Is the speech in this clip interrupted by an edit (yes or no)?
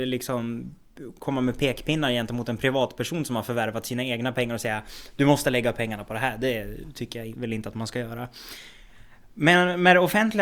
no